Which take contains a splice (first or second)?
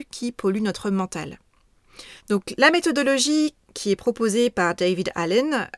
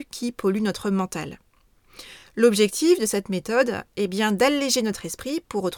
first